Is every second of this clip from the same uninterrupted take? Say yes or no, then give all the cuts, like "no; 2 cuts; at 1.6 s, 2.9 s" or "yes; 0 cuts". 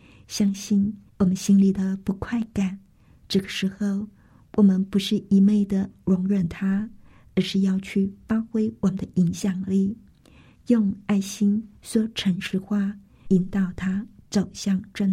no; 3 cuts; at 1.1 s, 3.2 s, 13.3 s